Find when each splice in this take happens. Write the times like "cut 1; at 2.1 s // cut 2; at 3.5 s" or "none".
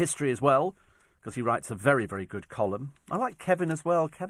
none